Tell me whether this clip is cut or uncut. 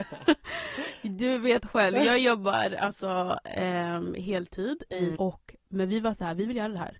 cut